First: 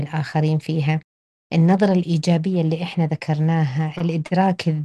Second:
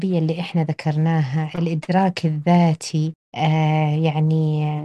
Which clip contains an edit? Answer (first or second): second